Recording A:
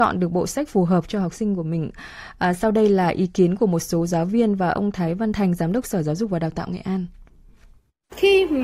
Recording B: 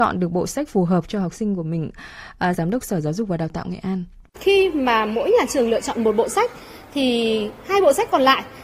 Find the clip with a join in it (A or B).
B